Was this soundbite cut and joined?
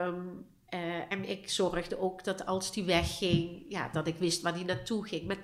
no; 0 cuts

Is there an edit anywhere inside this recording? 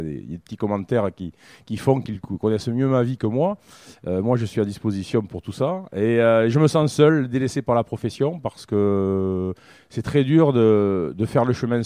no; 0 cuts

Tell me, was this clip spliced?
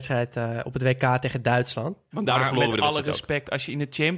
yes; 1 cut; at 2.1 s

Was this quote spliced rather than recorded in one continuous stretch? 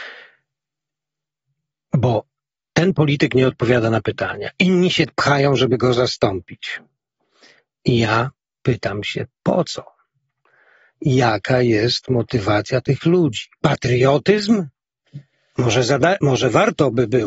no; 0 cuts

